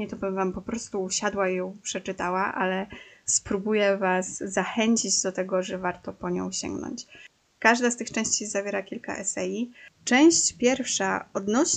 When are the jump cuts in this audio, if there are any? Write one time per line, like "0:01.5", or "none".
0:07.4